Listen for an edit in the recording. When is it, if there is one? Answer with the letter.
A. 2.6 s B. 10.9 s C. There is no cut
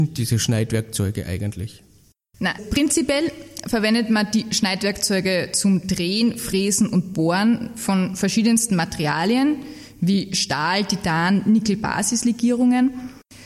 A